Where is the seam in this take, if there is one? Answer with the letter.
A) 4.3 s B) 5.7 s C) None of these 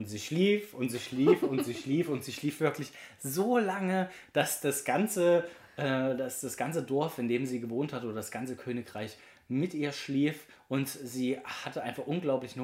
C